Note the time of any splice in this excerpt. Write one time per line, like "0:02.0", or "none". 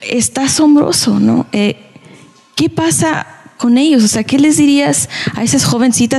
none